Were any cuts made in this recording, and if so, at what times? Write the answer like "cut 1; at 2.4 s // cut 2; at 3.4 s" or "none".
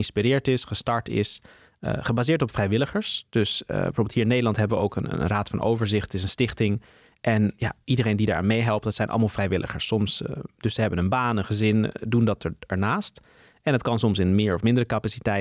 none